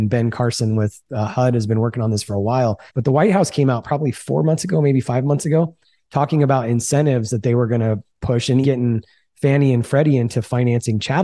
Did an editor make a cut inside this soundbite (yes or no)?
yes